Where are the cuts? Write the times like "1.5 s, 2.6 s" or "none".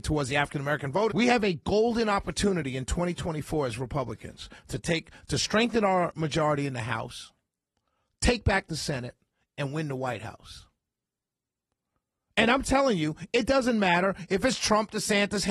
1.1 s